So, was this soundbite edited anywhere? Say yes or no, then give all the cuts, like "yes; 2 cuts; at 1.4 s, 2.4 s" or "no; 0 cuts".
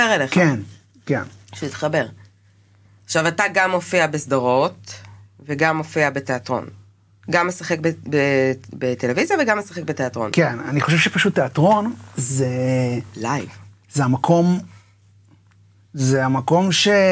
no; 0 cuts